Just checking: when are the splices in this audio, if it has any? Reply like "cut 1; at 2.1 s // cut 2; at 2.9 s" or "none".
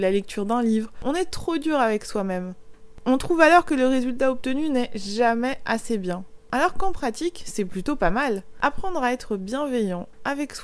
none